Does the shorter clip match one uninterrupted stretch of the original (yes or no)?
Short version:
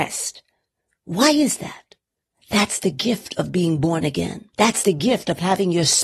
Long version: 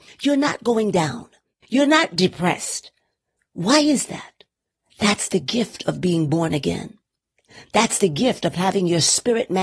no